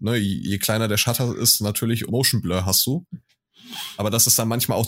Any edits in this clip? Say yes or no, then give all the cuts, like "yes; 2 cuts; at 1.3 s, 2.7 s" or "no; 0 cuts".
yes; 1 cut; at 2.1 s